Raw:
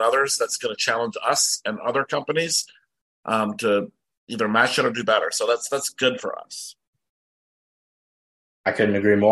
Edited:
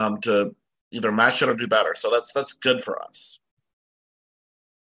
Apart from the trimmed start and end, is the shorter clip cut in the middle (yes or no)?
no